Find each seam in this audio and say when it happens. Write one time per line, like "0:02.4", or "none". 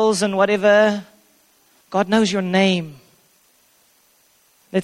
0:01.8